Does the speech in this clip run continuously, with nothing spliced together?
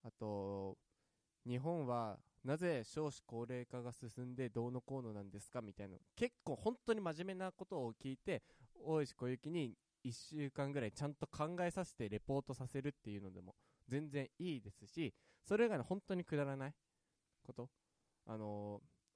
yes; 0 cuts

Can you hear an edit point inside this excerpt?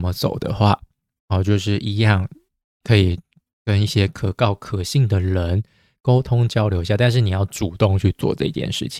no; 0 cuts

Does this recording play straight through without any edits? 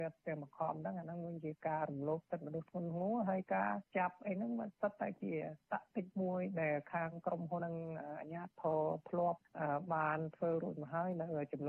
no; 1 cut; at 7.6 s

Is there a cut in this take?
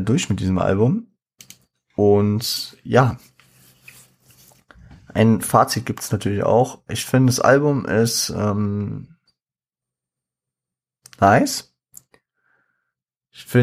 no; 0 cuts

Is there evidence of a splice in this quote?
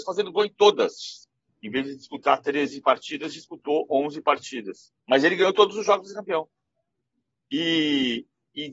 yes; 2 cuts; at 1.5 s, 5.0 s

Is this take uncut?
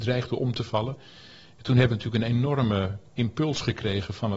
yes; 0 cuts

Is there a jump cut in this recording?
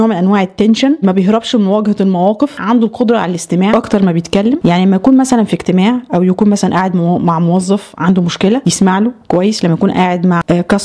yes; 1 cut; at 1.0 s

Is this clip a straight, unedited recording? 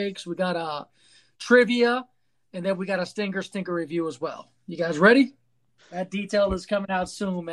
no; 1 cut; at 5.8 s

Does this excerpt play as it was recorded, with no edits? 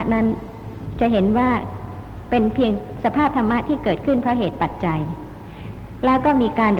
yes; 0 cuts

